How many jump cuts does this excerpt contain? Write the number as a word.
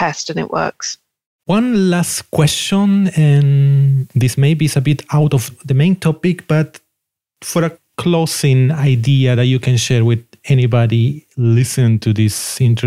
one